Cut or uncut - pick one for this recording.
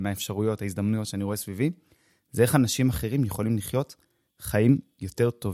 uncut